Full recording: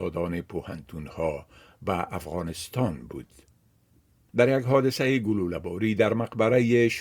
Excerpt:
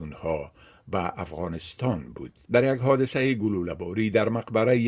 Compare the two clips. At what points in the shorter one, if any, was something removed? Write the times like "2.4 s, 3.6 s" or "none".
2.4 s